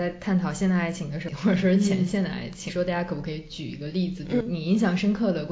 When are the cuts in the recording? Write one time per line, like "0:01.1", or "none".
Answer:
0:01.3
0:02.7
0:04.4